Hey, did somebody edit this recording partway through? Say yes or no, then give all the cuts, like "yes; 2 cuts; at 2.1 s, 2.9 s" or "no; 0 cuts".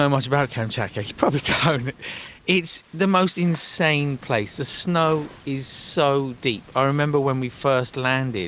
no; 0 cuts